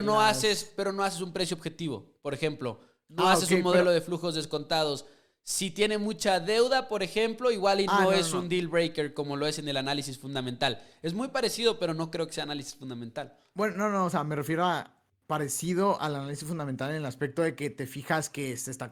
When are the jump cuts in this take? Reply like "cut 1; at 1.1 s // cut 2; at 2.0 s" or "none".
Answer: none